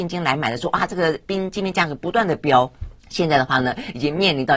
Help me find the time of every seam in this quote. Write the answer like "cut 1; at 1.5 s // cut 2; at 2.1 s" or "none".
cut 1; at 3.0 s